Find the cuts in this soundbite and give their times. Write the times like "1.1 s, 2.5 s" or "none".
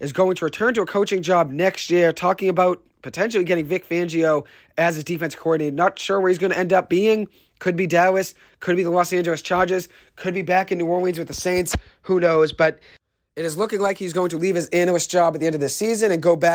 none